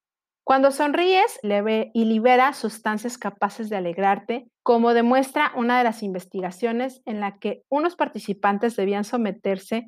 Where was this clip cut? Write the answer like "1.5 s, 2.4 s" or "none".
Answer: 1.4 s, 4.5 s

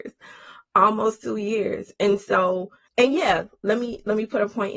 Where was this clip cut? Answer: 2.9 s

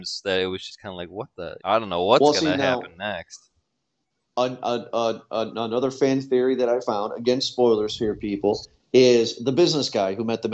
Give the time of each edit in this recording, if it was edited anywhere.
1.6 s

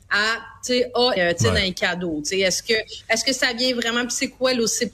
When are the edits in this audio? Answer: 1.2 s

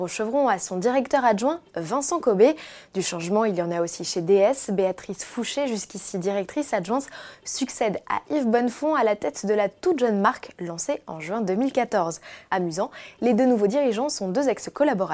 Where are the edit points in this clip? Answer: none

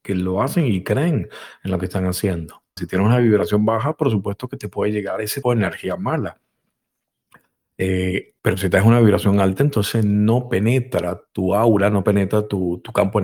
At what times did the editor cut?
2.8 s, 5.4 s, 8.4 s

